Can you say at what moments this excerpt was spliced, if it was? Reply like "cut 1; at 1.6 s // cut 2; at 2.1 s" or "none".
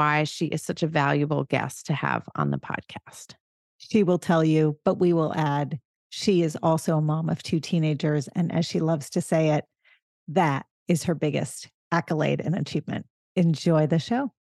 none